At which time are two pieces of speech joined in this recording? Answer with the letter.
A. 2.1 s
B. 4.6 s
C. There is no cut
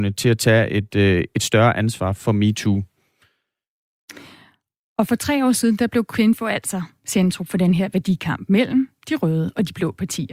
A